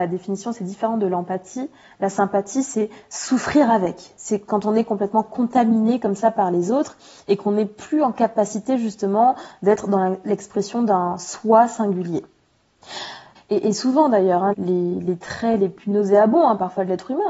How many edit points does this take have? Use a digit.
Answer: 2